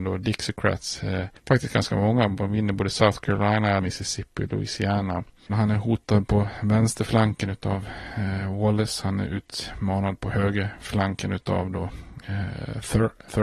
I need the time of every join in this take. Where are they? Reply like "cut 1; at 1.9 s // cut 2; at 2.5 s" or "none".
cut 1; at 3.8 s // cut 2; at 5.5 s